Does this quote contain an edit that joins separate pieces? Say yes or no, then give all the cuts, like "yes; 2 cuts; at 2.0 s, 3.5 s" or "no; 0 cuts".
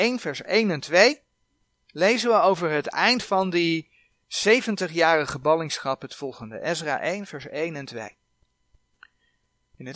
no; 0 cuts